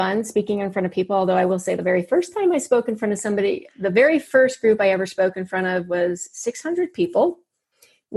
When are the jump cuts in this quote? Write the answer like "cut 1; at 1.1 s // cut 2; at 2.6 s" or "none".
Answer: none